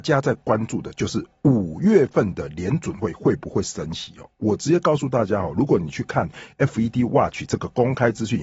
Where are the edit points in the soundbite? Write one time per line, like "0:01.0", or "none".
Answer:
none